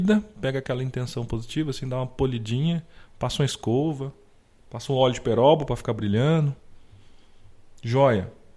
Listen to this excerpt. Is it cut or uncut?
uncut